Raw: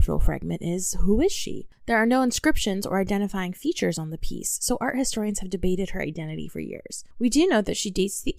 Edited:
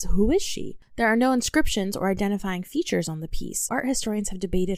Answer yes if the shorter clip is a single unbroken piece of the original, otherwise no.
no